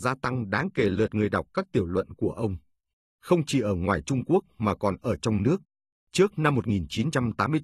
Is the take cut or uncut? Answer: cut